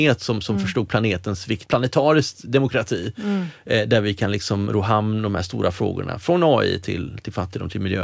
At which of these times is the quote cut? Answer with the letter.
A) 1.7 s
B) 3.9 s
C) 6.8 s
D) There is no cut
A